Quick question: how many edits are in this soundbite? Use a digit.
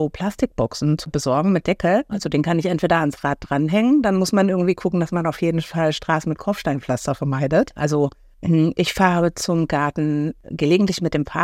2